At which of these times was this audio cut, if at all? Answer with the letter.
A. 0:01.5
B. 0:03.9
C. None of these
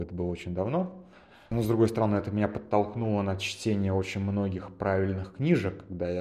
A